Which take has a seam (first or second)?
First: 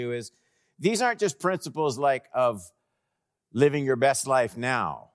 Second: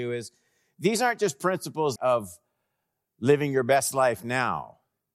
second